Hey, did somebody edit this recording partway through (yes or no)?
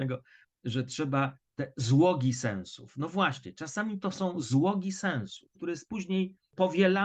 yes